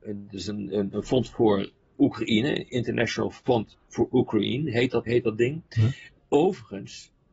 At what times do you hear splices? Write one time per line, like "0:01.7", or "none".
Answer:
0:05.1
0:06.2